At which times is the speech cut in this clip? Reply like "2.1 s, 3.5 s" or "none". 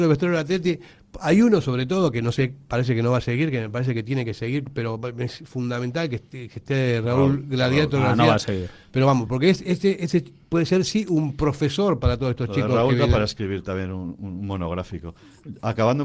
none